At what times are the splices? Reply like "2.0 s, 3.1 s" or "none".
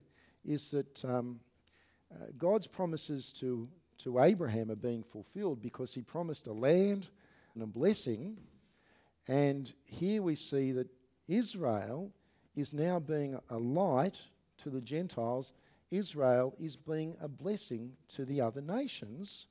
7.5 s